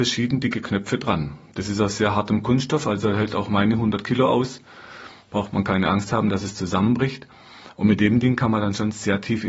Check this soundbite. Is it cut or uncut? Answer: uncut